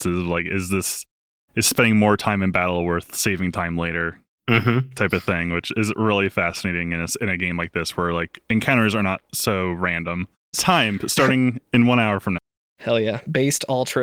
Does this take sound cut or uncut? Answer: cut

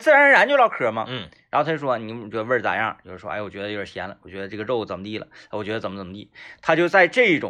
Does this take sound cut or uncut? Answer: uncut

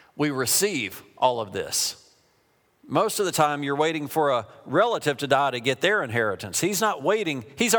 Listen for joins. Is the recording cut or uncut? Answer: cut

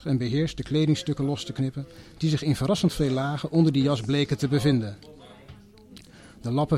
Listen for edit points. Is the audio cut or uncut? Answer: uncut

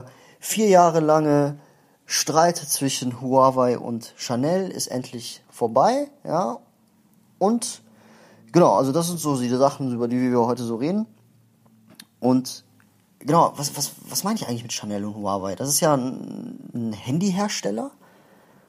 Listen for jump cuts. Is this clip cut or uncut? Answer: uncut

